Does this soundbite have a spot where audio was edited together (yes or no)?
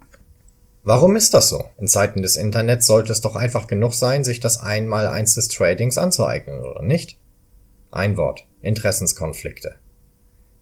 yes